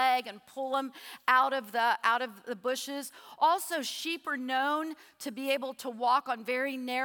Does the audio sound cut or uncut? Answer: uncut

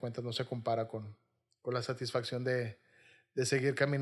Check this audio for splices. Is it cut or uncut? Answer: uncut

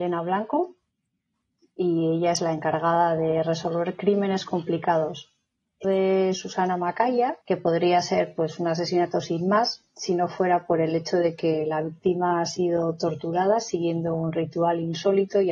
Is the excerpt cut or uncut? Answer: cut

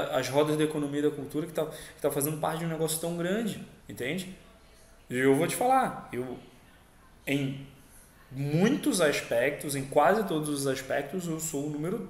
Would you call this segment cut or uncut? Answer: cut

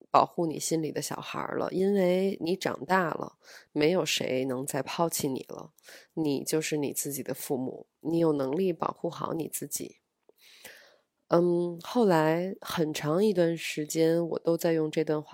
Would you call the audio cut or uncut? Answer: uncut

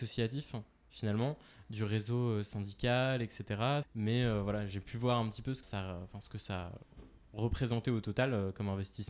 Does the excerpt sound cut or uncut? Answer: cut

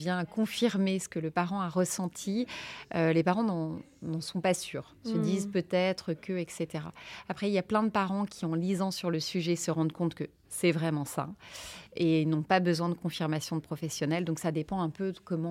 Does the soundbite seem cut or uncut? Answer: uncut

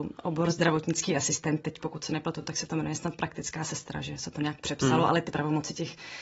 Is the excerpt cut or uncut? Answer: uncut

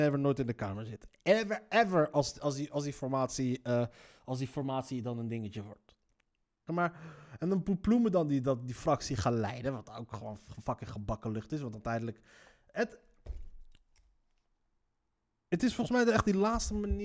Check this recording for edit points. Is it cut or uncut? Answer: cut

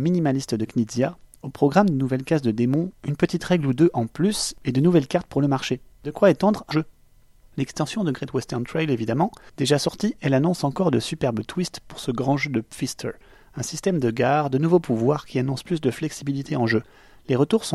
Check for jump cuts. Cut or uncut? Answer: cut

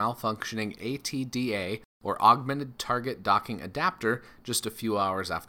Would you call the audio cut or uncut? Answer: uncut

